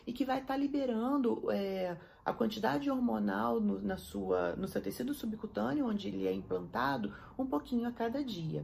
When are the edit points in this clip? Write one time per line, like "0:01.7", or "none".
none